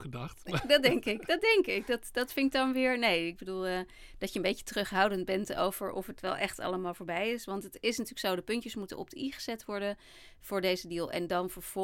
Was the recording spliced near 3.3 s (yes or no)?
no